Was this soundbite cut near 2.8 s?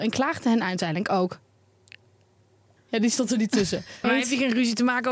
yes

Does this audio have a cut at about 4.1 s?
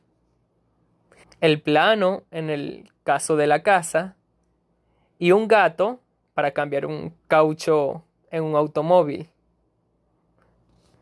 no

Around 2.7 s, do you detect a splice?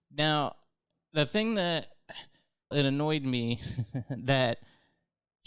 yes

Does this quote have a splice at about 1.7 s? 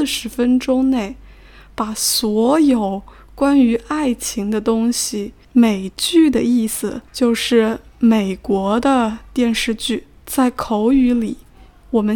no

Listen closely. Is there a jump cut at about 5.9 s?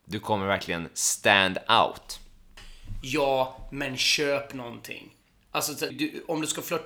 yes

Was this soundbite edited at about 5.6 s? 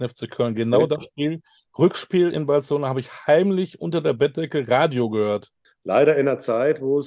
yes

